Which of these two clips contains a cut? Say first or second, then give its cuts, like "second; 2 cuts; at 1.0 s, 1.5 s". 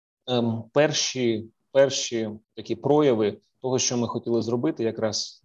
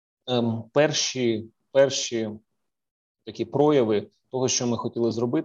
first; 1 cut; at 2.4 s